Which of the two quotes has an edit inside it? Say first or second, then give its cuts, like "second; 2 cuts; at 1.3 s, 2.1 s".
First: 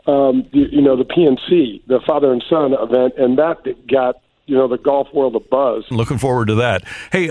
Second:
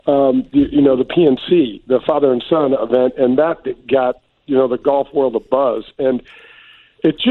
first; 1 cut; at 5.9 s